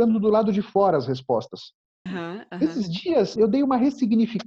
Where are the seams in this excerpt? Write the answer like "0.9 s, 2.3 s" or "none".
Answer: 2.1 s, 3.4 s

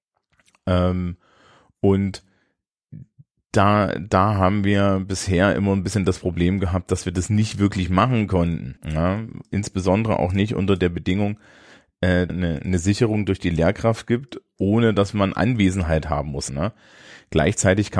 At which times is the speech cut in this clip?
8.8 s, 12.3 s, 16.5 s

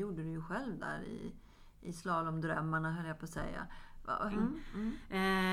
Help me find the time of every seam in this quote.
4.3 s

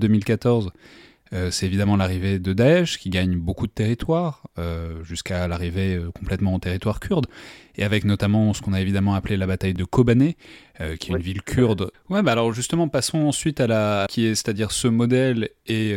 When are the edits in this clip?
11.9 s, 14.1 s

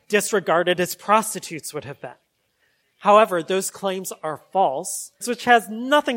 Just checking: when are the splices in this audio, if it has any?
5.2 s

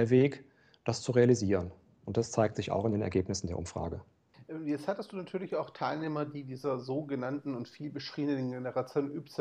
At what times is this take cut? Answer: none

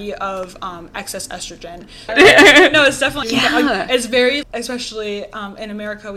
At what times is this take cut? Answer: 2.1 s, 3.2 s, 4.4 s

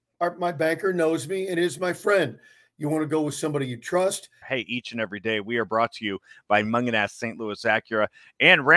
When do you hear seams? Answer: 4.4 s

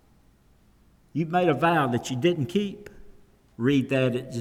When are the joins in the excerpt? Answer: 3.5 s

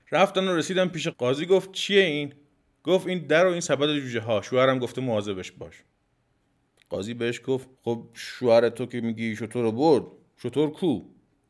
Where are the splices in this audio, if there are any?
1.1 s, 7.7 s

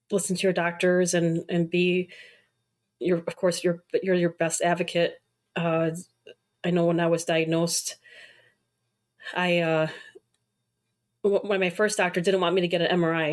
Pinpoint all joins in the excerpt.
none

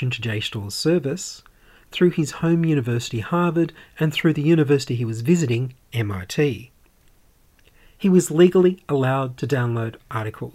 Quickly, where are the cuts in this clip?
none

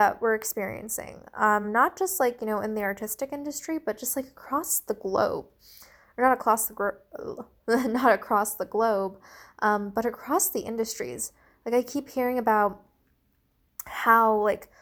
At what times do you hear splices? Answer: none

